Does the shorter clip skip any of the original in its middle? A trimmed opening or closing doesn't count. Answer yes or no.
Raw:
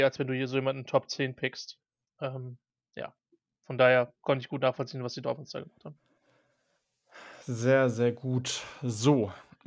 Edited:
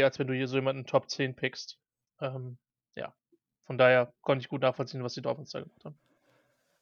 no